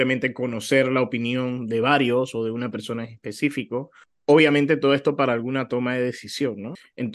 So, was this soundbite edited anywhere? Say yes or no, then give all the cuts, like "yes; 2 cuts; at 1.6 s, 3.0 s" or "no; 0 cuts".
no; 0 cuts